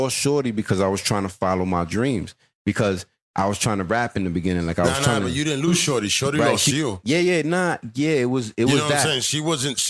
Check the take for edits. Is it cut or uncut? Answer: uncut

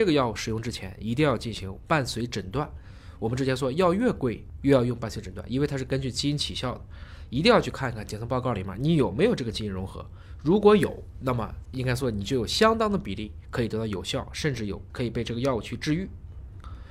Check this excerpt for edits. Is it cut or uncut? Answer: uncut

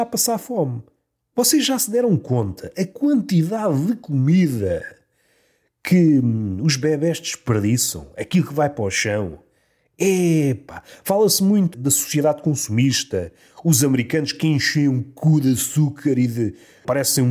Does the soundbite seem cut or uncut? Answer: uncut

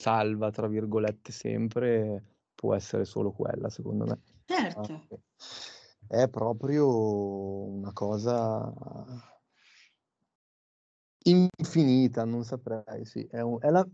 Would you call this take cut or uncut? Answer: cut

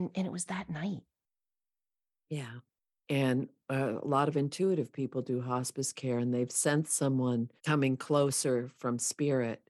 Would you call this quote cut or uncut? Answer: cut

